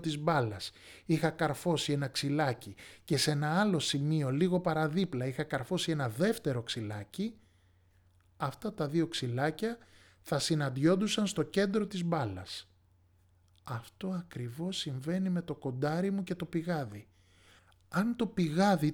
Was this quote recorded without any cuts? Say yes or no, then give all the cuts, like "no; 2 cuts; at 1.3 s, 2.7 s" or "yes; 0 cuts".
yes; 0 cuts